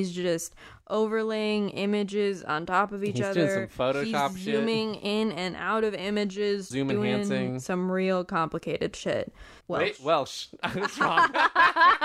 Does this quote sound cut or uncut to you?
cut